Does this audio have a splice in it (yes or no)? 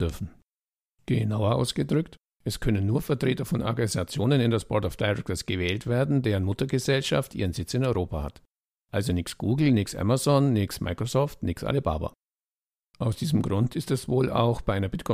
no